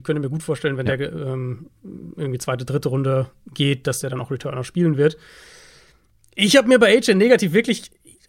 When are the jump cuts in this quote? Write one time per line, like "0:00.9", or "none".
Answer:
none